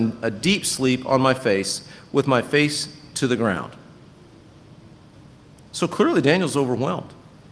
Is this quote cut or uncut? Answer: uncut